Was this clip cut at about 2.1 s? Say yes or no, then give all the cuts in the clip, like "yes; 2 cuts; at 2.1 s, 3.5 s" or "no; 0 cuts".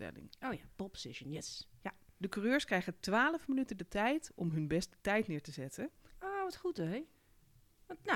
no; 1 cut; at 6.1 s